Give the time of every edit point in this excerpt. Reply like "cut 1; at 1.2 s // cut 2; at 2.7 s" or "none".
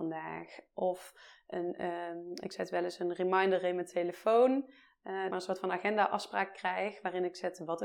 cut 1; at 5.3 s

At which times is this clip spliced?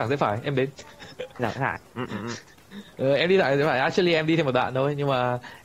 none

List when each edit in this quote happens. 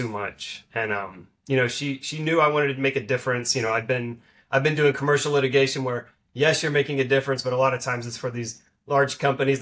none

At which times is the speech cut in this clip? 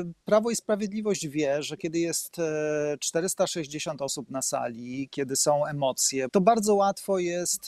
cut 1; at 6.3 s

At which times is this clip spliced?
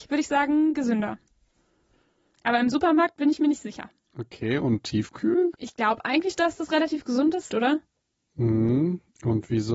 cut 1; at 5.5 s // cut 2; at 7.5 s

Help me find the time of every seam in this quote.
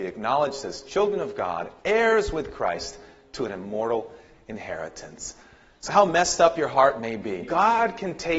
cut 1; at 5.9 s // cut 2; at 7.4 s

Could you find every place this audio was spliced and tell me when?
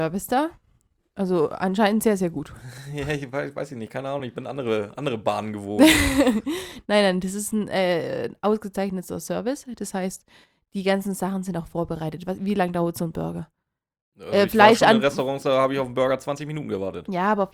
none

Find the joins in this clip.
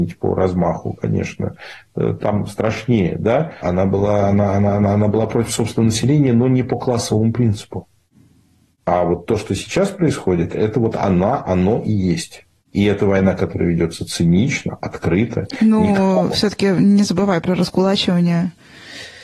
cut 1; at 3.6 s

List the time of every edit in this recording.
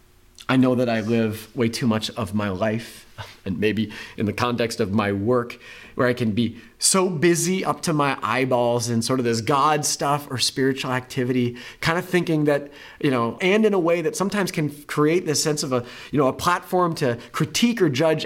cut 1; at 13.4 s

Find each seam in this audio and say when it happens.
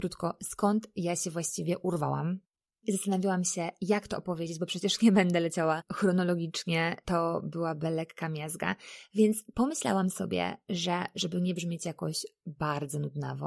none

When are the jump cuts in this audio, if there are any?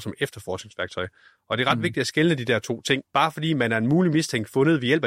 cut 1; at 3.0 s

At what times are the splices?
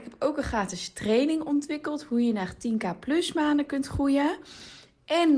none

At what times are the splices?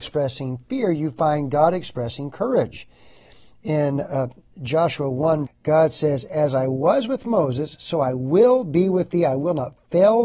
cut 1; at 5.5 s

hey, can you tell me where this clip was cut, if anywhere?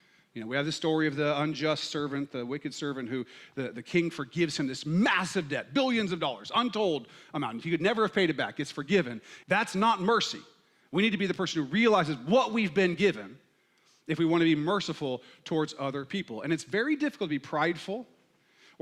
cut 1; at 9.4 s

